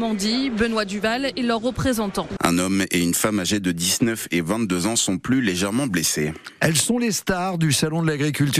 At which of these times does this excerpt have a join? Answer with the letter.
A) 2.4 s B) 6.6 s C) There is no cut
A